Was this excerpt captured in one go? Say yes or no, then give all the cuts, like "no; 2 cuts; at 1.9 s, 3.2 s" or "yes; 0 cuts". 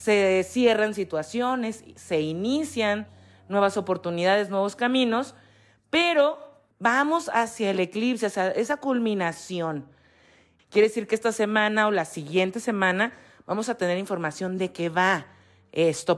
no; 2 cuts; at 6.7 s, 10.6 s